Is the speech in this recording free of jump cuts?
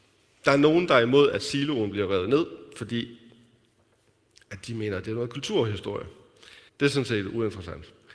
no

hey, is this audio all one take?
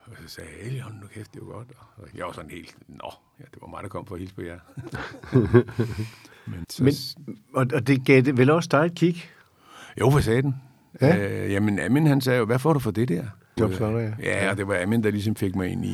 no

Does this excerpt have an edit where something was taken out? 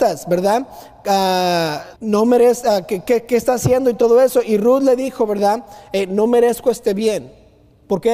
yes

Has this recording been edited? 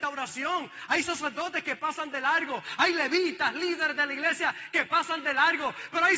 no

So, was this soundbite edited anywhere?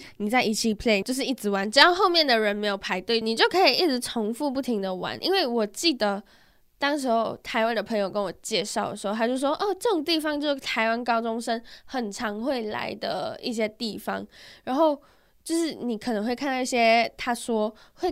yes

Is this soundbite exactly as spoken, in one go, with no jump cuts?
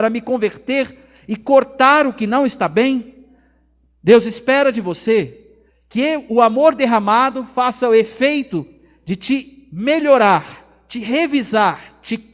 no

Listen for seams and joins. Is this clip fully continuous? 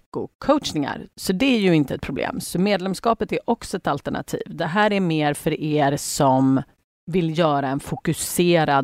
yes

